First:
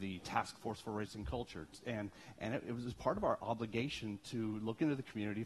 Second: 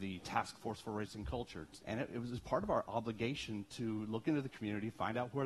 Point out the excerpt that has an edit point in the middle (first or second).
second